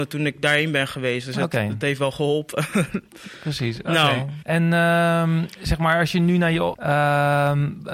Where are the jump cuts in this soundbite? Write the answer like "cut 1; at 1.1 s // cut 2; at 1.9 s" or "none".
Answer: cut 1; at 4.4 s // cut 2; at 6.7 s